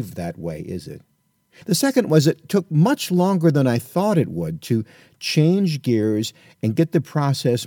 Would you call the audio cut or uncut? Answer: cut